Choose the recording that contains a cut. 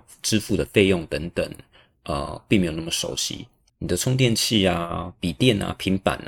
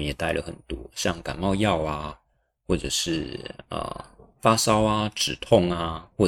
first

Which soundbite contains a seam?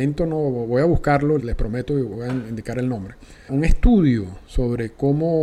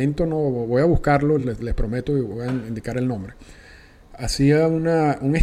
first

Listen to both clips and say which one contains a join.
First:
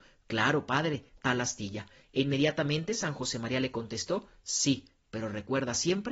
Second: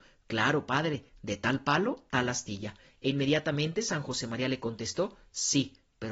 first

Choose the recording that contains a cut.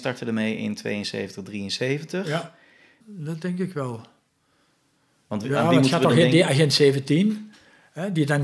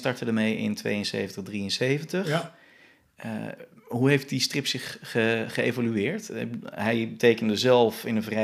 first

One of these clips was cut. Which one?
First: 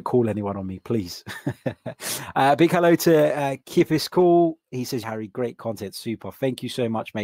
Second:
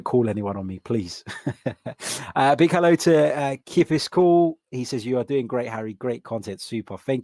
first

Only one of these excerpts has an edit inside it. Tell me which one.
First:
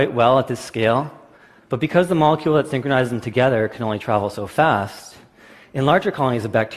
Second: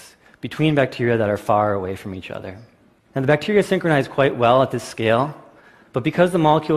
second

